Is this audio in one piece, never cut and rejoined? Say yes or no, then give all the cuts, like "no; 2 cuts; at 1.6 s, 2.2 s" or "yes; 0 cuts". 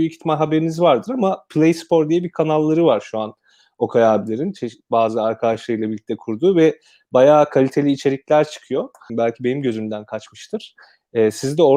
no; 1 cut; at 9.1 s